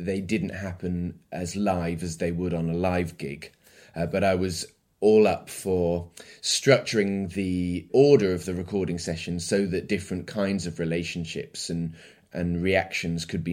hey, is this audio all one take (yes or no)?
yes